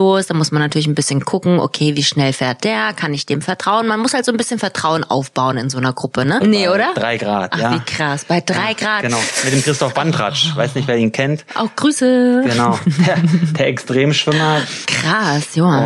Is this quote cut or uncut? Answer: cut